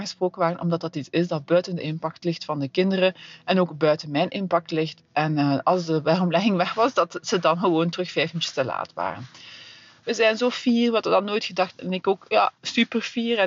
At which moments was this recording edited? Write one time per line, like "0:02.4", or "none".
0:10.0